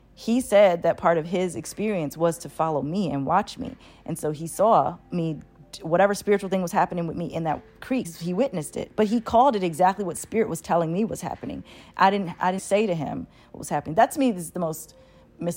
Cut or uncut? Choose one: cut